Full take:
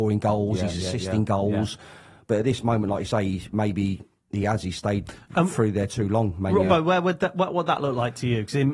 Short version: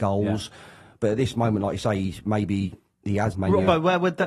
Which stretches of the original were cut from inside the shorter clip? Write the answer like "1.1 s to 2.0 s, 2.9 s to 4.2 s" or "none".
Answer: 4.6 s to 6.3 s